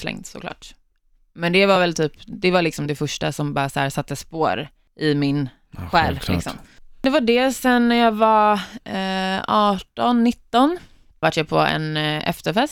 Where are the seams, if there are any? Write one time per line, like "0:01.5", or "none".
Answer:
none